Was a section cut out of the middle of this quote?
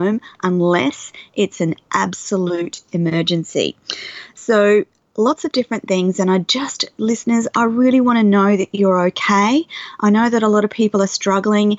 no; 0 cuts

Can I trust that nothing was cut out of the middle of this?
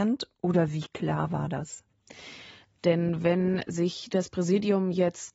no; 1 cut; at 2.8 s

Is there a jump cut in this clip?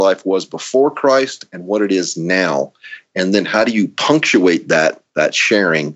no; 0 cuts

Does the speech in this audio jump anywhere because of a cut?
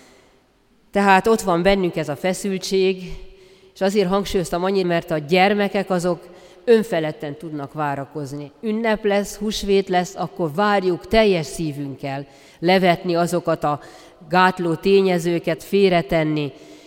yes; 3 cuts; at 4.8 s, 12.5 s, 15.6 s

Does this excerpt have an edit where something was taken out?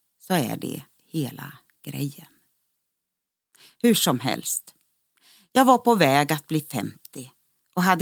no; 0 cuts

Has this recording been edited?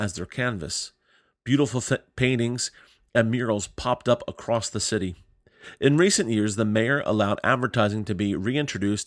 no; 0 cuts

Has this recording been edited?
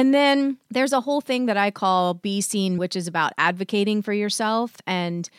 yes; 1 cut; at 2.8 s

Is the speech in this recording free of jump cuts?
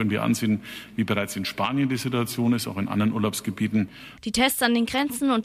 no; 1 cut; at 4.2 s

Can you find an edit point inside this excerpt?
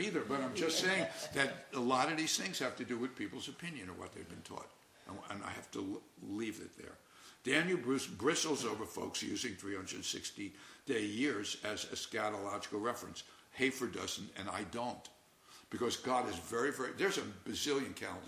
no; 0 cuts

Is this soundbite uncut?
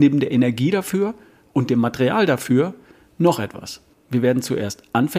no; 1 cut; at 3.9 s

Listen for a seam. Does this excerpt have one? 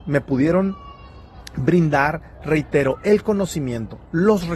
no; 0 cuts

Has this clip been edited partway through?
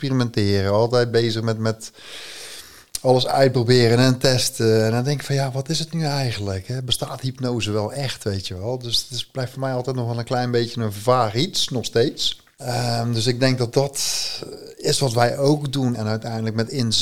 yes; 2 cuts; at 12.6 s, 15.9 s

